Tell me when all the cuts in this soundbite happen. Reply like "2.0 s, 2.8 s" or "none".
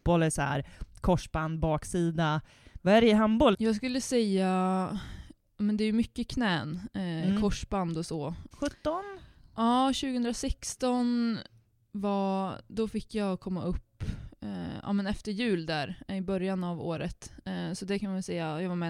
3.5 s, 8.5 s